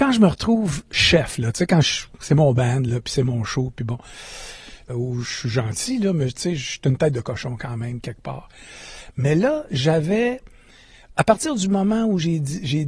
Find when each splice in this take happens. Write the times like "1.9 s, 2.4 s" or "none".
4.9 s